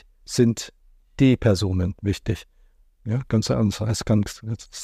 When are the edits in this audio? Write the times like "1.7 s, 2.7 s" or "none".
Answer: 2.9 s

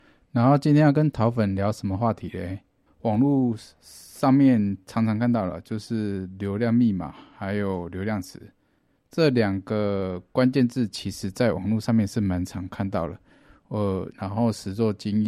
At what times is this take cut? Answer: 2.9 s, 14.1 s

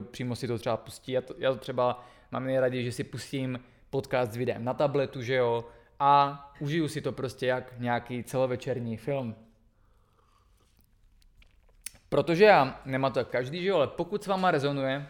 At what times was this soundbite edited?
none

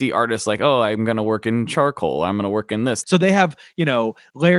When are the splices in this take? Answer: 3.0 s

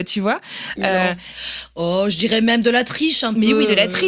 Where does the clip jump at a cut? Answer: none

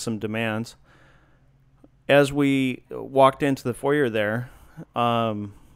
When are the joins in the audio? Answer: none

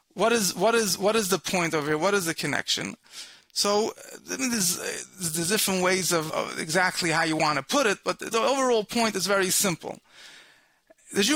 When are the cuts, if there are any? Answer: 6.3 s, 8.3 s

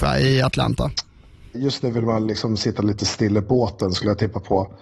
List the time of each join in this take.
1.5 s

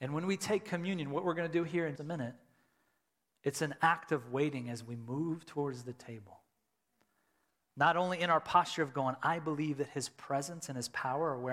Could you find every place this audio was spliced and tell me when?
2.0 s

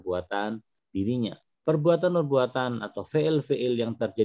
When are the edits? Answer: 1.5 s

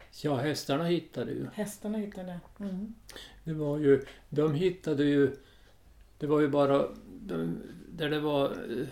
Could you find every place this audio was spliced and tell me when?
none

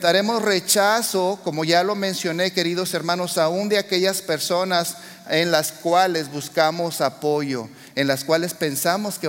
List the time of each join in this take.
none

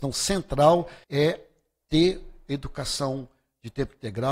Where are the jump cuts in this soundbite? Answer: 1.0 s

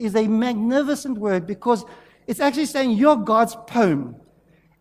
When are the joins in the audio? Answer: none

